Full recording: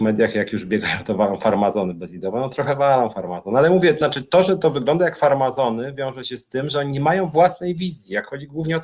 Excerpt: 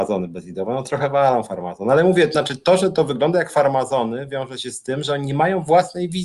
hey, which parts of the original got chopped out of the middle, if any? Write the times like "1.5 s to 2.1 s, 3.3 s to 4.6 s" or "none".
none

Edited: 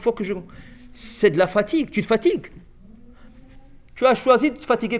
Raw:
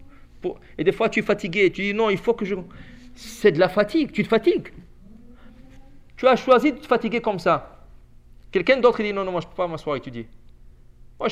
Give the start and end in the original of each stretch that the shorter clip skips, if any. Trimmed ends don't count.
none

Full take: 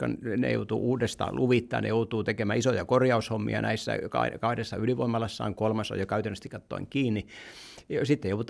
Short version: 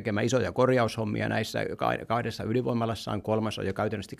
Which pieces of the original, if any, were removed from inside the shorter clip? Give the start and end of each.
none

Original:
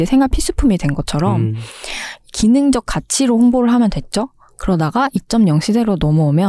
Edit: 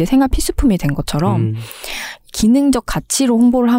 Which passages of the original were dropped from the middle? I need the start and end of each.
none

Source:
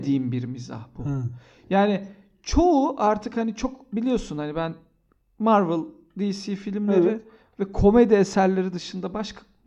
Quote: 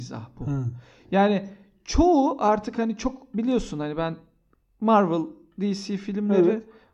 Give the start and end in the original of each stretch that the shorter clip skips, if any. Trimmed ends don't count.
none

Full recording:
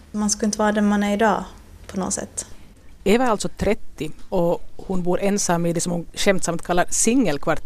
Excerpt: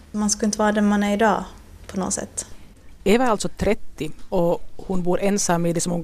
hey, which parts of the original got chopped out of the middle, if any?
none

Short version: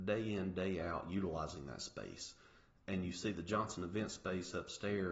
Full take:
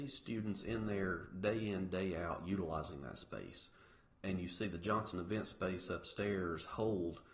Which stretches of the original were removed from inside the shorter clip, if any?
none

